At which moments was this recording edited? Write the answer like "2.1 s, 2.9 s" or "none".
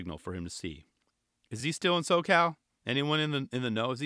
none